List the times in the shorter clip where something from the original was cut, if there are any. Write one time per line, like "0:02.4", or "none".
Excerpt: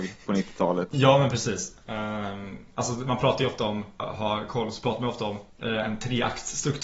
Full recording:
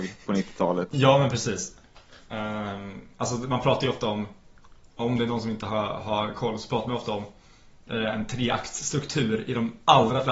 0:01.8
0:04.0
0:05.5